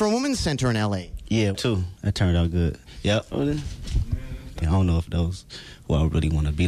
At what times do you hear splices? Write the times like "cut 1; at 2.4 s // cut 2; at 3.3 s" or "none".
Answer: cut 1; at 1.5 s // cut 2; at 3.3 s // cut 3; at 4.6 s